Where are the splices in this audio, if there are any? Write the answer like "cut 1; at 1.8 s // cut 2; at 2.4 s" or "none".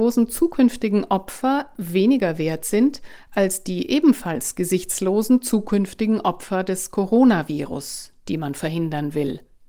none